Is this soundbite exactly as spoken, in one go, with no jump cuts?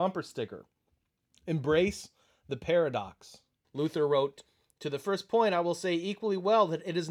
no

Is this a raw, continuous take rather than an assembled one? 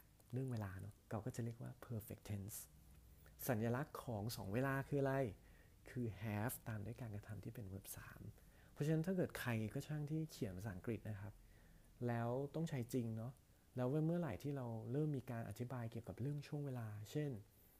no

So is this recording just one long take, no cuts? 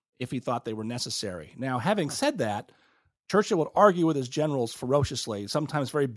yes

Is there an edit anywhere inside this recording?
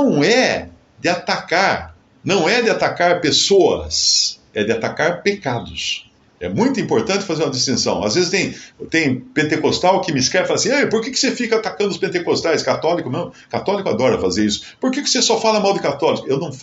yes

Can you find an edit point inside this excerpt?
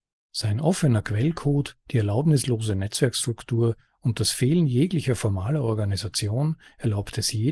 no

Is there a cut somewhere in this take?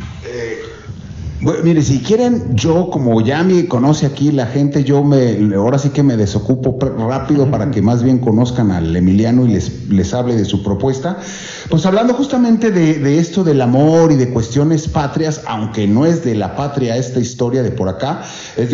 no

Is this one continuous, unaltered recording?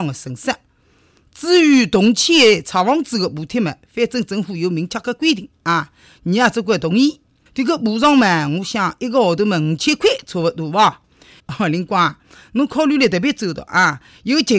no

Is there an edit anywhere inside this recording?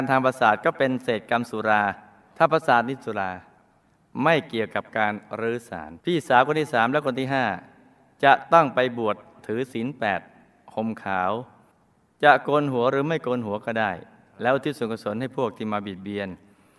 yes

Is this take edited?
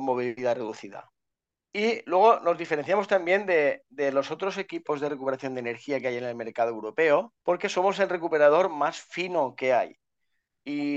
yes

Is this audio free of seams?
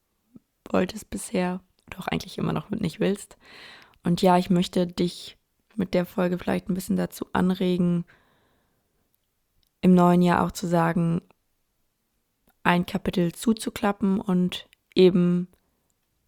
no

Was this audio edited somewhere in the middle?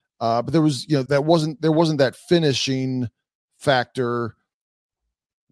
yes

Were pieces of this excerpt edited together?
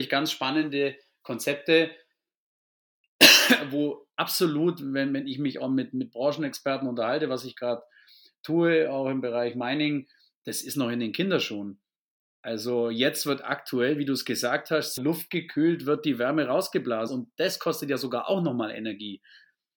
yes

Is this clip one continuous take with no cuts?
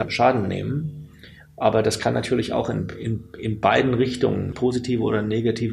yes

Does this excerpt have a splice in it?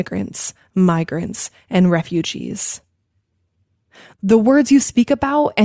no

